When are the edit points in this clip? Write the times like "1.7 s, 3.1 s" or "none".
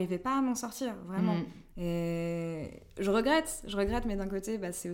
1.8 s